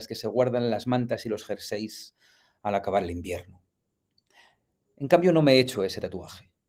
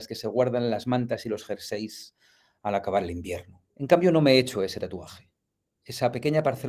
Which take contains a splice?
second; 1 cut; at 3.7 s

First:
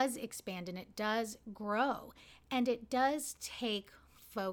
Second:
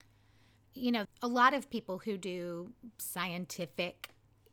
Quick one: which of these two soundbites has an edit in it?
second; 1 cut; at 1.0 s

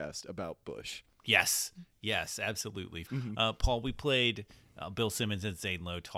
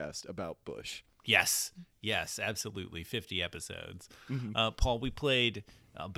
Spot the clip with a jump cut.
first; 1 cut; at 3.1 s

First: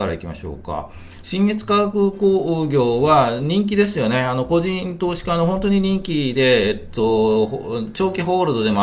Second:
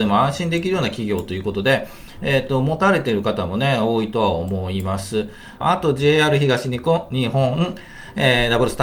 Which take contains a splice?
second; 1 cut; at 5.6 s

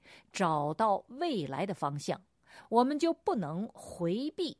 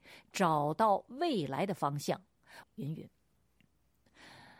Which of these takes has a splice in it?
second; 1 cut; at 2.6 s

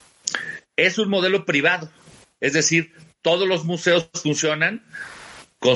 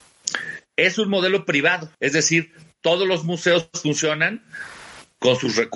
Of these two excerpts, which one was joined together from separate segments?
second; 1 cut; at 1.9 s

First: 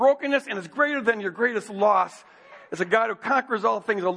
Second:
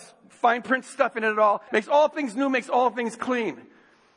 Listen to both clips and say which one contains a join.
second; 1 cut; at 1.7 s

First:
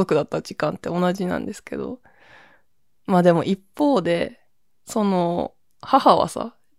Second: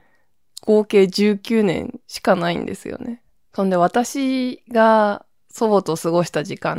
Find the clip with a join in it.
second; 1 cut; at 3.4 s

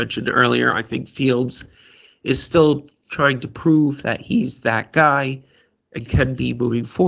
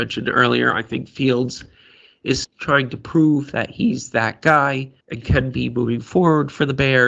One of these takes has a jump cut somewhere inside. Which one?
second; 2 cuts; at 2.4 s, 5.0 s

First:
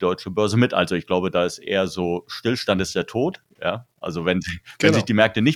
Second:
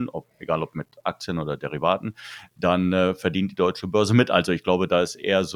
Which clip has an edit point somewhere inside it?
first; 1 cut; at 3.5 s

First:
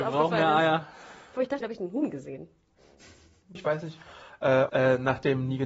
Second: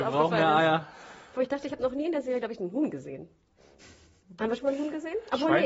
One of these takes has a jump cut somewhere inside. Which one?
first; 3 cuts; at 1.6 s, 3.6 s, 4.7 s

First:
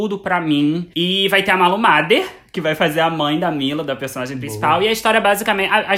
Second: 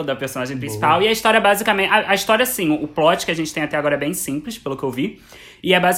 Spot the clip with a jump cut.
first; 1 cut; at 0.9 s

